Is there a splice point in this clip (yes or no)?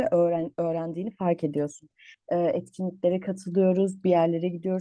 yes